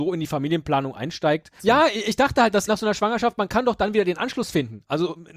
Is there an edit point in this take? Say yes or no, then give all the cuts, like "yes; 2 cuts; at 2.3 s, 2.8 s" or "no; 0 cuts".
yes; 2 cuts; at 1.6 s, 2.7 s